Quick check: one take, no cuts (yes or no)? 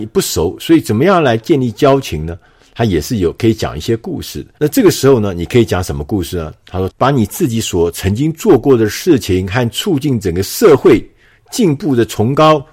no